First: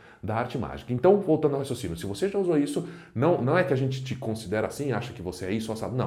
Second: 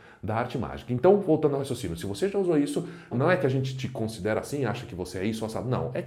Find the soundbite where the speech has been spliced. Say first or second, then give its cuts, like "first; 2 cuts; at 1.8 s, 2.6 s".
second; 1 cut; at 3.1 s